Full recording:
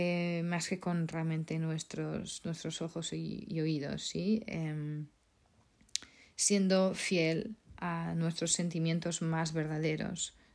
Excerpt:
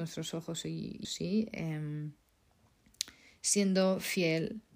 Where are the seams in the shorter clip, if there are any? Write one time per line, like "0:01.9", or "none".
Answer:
0:01.0